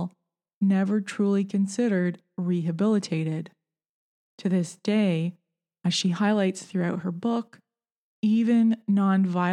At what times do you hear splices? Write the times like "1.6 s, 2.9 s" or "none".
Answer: none